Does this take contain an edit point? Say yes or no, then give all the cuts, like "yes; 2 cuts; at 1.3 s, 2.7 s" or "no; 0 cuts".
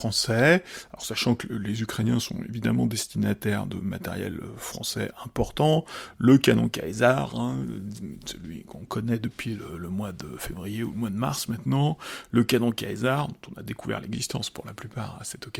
no; 0 cuts